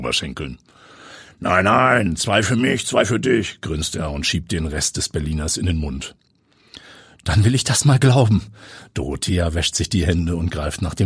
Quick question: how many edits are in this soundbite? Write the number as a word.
zero